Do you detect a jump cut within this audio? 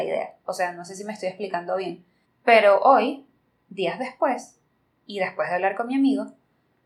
yes; 1 cut; at 2.2 s

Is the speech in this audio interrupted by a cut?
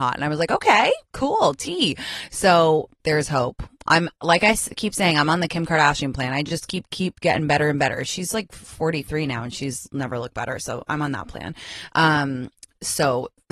no; 0 cuts

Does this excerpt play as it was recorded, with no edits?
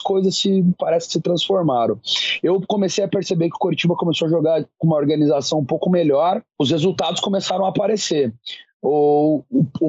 yes; 0 cuts

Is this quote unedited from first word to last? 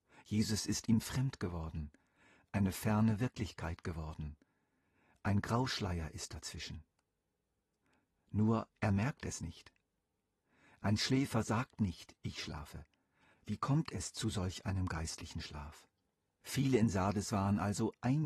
no; 2 cuts; at 13.3 s, 16.4 s

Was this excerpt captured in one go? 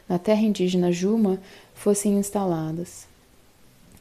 yes; 0 cuts

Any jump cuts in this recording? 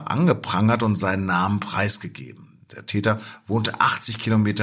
no; 0 cuts

